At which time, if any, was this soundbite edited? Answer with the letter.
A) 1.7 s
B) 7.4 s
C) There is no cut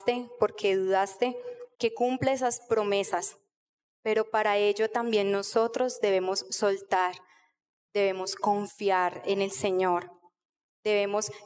A